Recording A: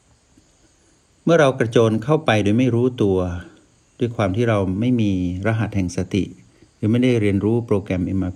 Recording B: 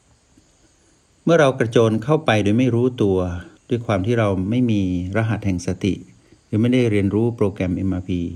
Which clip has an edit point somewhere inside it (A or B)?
B